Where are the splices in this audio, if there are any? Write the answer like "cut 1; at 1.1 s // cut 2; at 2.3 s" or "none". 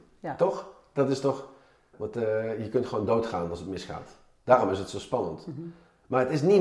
cut 1; at 1.9 s